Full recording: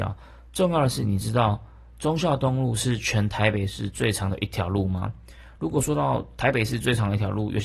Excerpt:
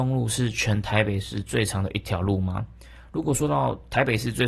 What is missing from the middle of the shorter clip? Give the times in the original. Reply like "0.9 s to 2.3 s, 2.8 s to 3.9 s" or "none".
none